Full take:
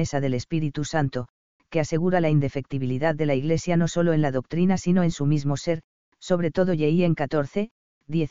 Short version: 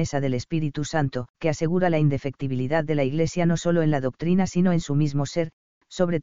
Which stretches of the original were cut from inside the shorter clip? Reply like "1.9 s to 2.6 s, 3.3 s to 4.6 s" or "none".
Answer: 1.3 s to 1.7 s

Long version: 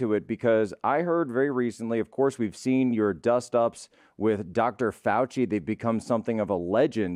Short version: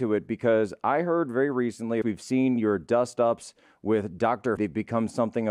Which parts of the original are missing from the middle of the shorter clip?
2.0 s to 2.4 s, 4.9 s to 5.5 s

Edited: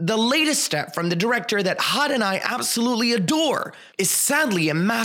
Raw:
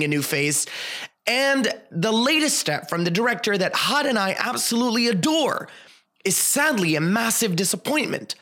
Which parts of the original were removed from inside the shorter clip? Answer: 5.8 s to 6.2 s

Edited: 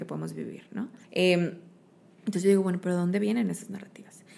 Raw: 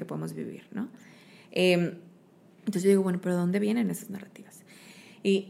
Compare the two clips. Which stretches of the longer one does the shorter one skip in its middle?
1.0 s to 1.4 s

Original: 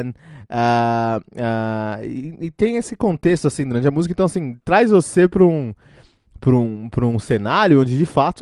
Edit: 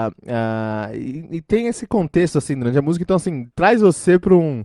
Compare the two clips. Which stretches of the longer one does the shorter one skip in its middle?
none

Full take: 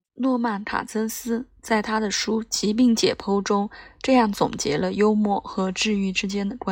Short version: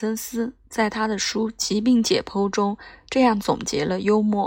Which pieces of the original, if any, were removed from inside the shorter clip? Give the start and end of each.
none

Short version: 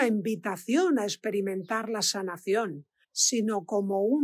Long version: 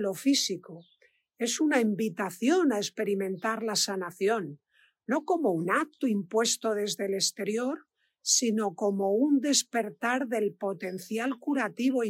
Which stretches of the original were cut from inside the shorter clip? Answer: 4.8 s to 8.1 s

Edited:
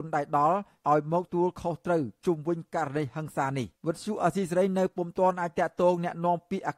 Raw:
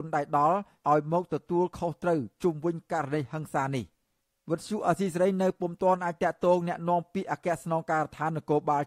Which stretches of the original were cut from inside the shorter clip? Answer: 1.3 s to 1.4 s, 3.9 s to 4.4 s

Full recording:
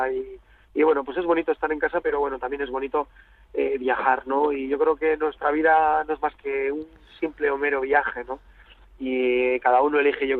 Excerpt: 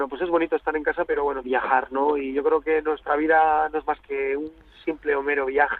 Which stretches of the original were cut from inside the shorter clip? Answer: 2.4 s to 3.8 s

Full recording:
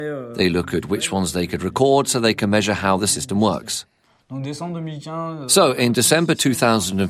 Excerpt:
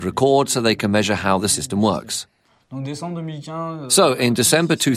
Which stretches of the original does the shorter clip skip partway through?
none

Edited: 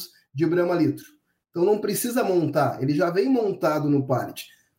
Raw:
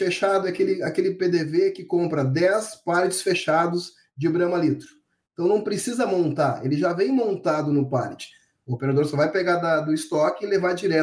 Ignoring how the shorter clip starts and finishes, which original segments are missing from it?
none

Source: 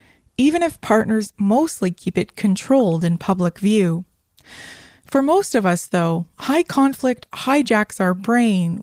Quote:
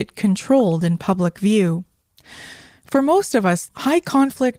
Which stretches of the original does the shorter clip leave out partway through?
5.9 s to 6.3 s

